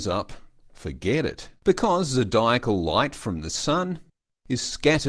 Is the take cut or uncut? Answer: cut